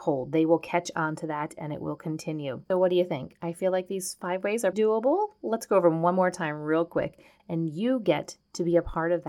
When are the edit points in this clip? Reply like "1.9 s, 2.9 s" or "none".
4.7 s, 7.4 s